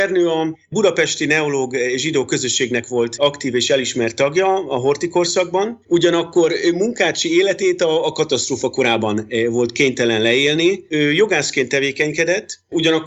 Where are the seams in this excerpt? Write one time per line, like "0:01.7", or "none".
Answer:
0:05.8
0:10.9